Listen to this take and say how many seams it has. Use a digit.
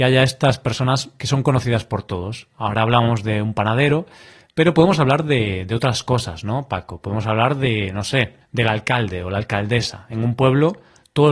0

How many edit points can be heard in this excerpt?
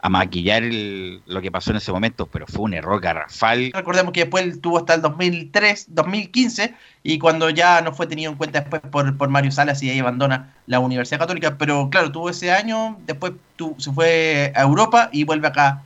1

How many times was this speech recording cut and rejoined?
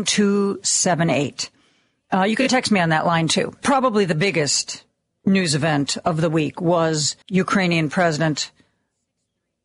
2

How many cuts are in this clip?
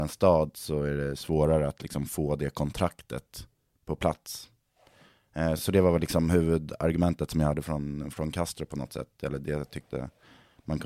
0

